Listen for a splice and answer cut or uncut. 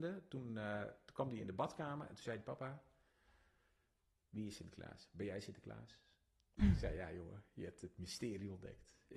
uncut